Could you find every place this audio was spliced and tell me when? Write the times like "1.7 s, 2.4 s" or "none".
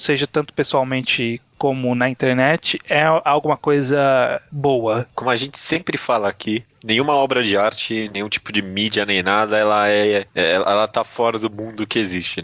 none